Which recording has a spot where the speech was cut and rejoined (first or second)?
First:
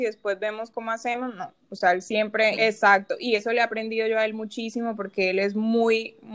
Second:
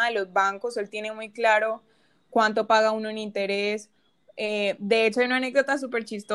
first